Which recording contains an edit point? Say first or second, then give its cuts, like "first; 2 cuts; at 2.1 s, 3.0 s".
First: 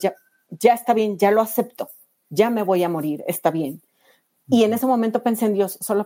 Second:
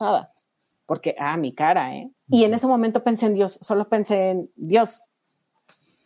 second; 1 cut; at 2.1 s